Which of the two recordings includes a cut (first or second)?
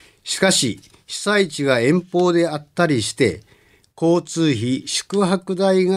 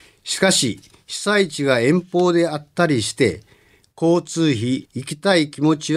second